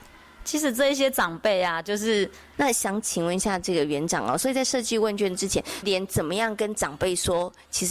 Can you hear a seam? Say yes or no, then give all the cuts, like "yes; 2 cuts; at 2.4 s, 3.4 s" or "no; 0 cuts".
yes; 2 cuts; at 2.5 s, 5.8 s